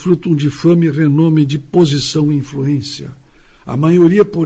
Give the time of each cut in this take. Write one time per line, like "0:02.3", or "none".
none